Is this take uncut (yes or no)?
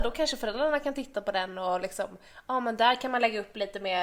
yes